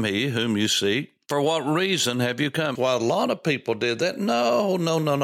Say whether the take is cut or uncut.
cut